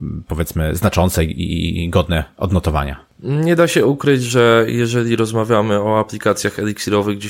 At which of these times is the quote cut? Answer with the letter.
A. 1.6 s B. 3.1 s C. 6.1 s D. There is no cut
D